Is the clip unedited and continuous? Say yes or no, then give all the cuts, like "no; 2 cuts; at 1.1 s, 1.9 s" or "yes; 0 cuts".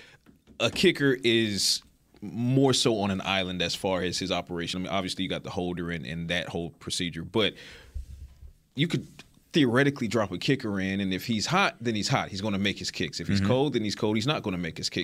yes; 0 cuts